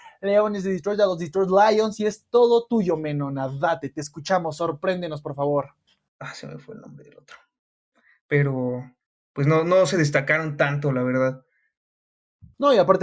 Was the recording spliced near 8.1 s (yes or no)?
no